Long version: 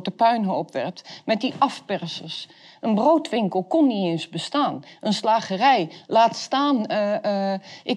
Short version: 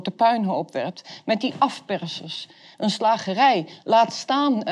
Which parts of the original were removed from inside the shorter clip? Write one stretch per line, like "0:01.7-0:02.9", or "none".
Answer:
0:02.7-0:05.0